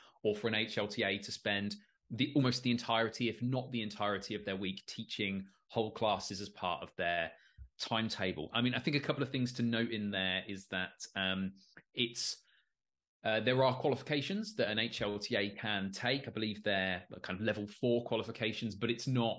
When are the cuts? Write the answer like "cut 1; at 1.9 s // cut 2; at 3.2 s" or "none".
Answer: none